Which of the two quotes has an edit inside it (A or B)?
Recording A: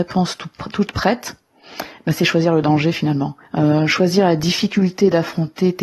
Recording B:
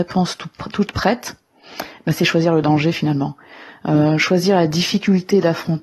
A